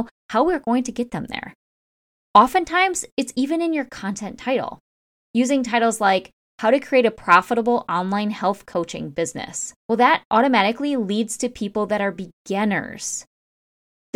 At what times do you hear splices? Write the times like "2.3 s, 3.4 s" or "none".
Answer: 9.8 s